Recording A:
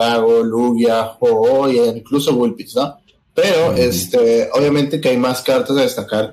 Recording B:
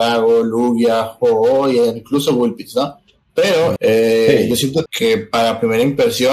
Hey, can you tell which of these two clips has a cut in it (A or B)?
B